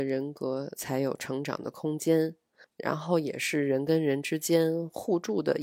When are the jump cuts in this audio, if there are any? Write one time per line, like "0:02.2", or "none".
0:02.6